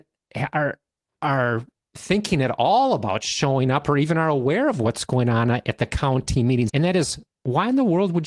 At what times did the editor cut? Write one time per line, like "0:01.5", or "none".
0:06.7